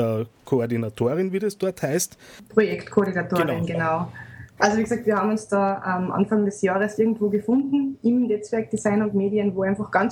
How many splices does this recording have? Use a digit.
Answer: 1